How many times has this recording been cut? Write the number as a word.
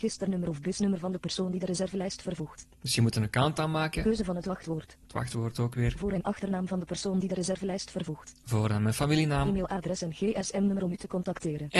one